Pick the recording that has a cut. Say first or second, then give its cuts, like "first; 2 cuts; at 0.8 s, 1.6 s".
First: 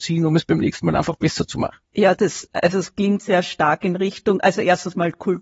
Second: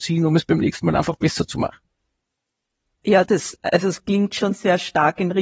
first; 2 cuts; at 1.8 s, 3.2 s